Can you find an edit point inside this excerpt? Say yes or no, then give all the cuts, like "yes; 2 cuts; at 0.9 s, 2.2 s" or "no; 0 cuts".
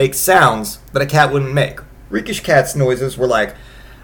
yes; 1 cut; at 2.0 s